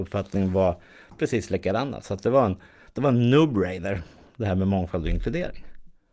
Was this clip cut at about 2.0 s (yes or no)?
no